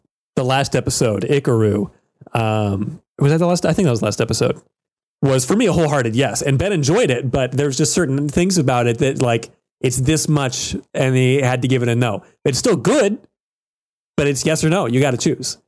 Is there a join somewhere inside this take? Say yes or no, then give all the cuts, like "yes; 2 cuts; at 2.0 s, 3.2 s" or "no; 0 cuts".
no; 0 cuts